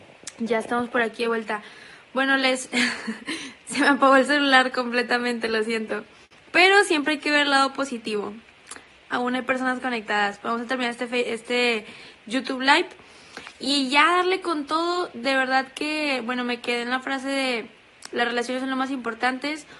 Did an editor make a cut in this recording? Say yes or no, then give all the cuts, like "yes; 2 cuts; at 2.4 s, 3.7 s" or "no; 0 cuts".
no; 0 cuts